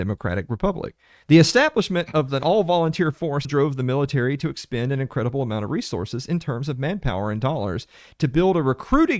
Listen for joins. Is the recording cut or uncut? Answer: cut